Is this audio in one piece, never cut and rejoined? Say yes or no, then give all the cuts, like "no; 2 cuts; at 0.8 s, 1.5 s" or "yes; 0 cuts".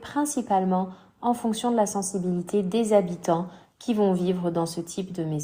yes; 0 cuts